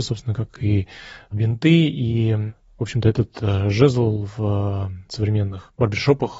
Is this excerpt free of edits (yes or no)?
yes